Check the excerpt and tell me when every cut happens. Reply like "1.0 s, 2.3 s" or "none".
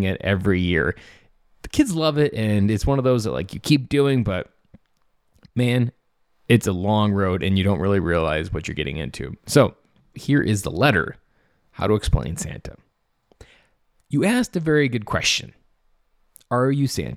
10.1 s